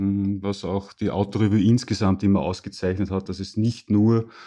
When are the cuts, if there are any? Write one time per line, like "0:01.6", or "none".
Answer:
none